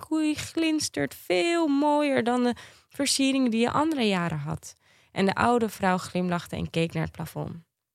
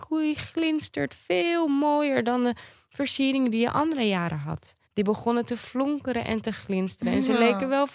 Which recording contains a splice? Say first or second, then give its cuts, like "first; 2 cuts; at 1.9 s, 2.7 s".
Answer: second; 1 cut; at 4.8 s